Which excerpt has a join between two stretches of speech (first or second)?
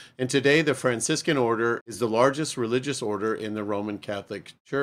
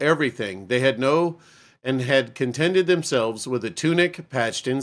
first